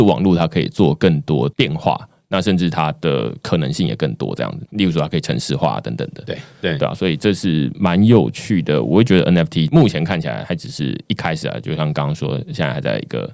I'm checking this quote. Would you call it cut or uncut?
uncut